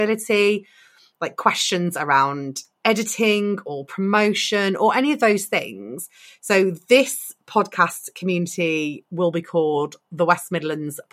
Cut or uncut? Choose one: uncut